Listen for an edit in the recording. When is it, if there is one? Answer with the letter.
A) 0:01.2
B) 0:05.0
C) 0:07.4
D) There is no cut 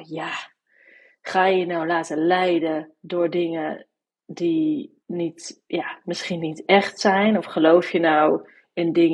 B